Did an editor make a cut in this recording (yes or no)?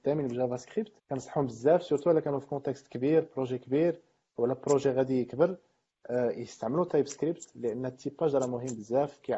yes